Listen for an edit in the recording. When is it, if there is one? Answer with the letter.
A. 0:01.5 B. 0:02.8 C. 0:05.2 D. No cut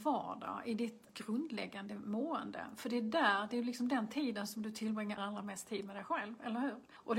C